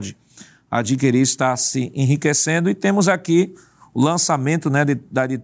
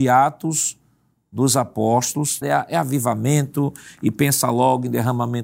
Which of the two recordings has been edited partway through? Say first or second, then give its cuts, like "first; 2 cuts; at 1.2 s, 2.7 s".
second; 1 cut; at 2.4 s